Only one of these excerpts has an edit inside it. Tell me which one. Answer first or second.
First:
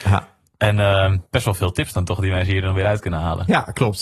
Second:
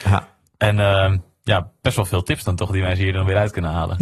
first